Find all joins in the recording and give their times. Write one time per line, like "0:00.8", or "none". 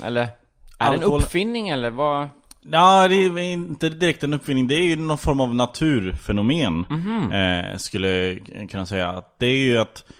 none